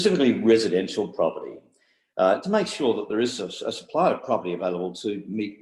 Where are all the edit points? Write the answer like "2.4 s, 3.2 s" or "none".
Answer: none